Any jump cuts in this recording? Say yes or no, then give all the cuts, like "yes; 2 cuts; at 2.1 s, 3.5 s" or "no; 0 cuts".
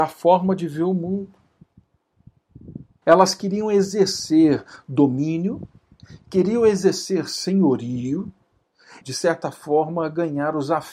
yes; 2 cuts; at 3.0 s, 9.0 s